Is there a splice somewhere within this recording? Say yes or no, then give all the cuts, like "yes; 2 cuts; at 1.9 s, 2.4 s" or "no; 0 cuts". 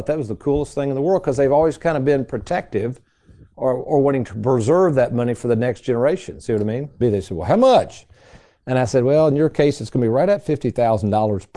yes; 1 cut; at 7.0 s